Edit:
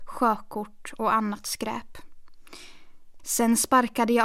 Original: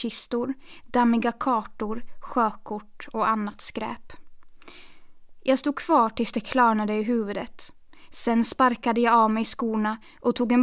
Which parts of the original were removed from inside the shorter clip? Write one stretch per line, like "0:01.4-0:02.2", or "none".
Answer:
0:05.3-0:08.1